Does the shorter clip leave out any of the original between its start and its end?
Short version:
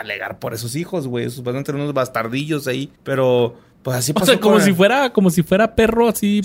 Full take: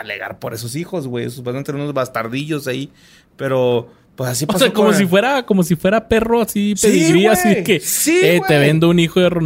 yes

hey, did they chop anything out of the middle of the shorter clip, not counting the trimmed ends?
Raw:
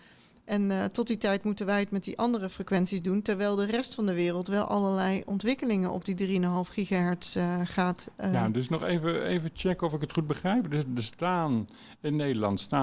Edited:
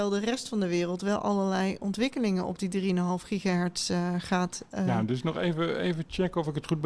no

